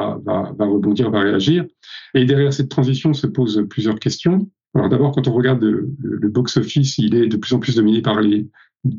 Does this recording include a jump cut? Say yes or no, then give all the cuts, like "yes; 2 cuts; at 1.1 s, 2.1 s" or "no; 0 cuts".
no; 0 cuts